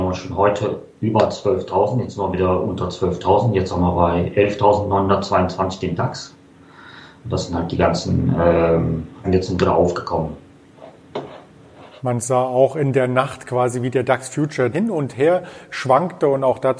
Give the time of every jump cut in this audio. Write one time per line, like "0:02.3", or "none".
0:09.2
0:14.7

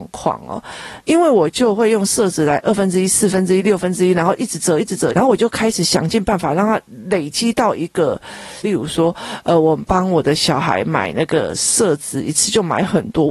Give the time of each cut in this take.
0:01.0
0:05.1
0:08.6

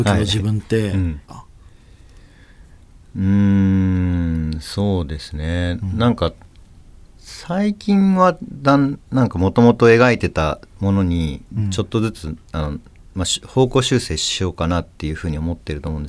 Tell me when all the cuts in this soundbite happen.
0:01.3

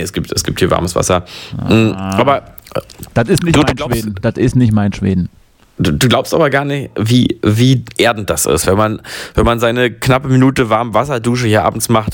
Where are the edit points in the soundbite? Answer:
none

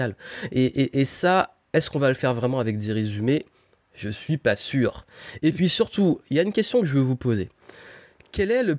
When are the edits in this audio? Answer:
none

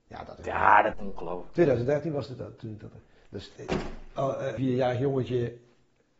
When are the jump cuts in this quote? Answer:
0:00.9
0:03.6
0:04.6

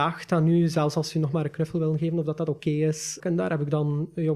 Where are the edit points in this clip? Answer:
0:03.2

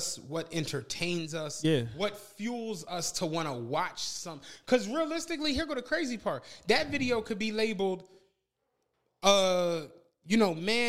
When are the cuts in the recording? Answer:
none

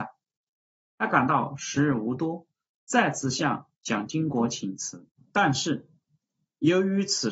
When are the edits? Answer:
none

